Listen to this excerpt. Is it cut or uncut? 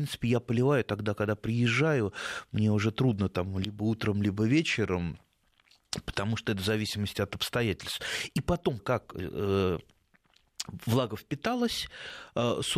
cut